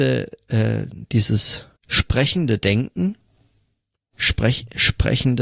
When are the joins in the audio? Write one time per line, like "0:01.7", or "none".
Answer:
0:01.8